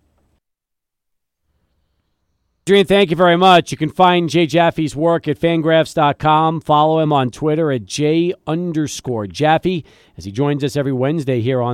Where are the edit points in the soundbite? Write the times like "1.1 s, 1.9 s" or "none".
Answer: none

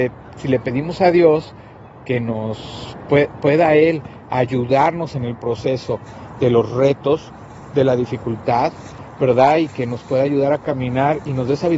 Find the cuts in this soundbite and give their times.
none

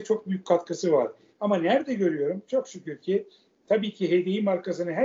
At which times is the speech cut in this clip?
1.3 s

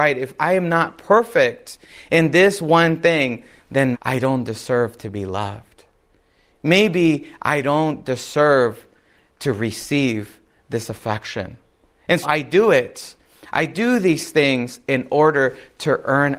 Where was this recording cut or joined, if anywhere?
3.9 s, 12.2 s

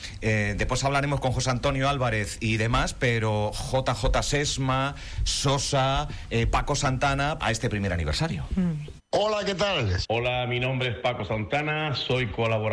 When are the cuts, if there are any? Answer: 7.4 s, 9.0 s, 10.0 s

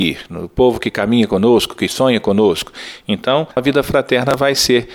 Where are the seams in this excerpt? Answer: none

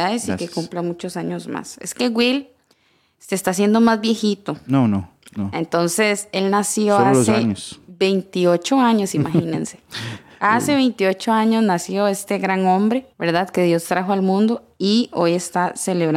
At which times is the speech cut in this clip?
13.1 s

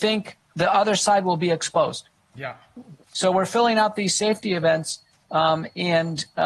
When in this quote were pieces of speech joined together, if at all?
3.0 s

